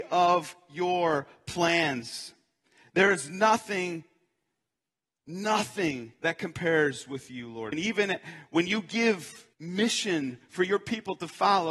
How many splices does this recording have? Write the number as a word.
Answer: two